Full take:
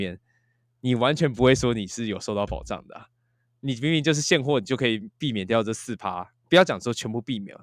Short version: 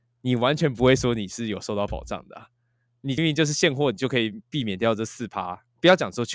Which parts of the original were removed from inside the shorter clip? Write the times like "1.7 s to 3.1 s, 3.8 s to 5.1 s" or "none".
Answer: 3.8 s to 3.9 s